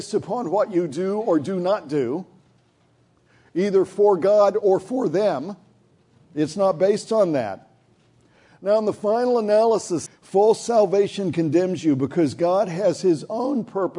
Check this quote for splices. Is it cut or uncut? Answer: cut